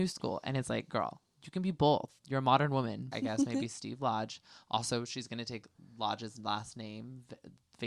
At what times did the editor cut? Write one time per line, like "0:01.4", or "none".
0:03.1